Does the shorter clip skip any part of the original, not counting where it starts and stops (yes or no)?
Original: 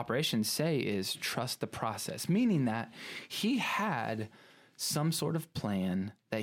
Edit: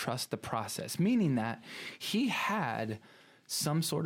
no